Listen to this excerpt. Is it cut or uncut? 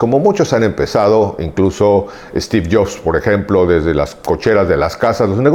uncut